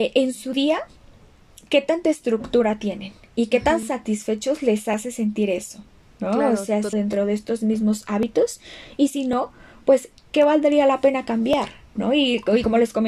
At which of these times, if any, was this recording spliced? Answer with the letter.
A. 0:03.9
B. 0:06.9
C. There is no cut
B